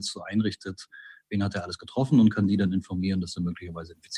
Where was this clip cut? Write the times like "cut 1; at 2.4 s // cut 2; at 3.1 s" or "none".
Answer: none